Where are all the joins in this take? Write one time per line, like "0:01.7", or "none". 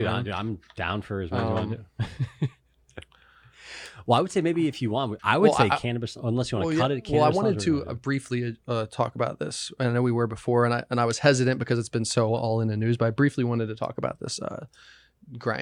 0:05.2